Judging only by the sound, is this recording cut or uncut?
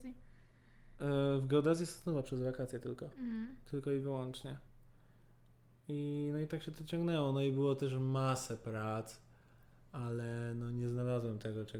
uncut